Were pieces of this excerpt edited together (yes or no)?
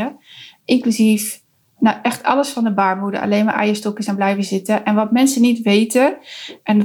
no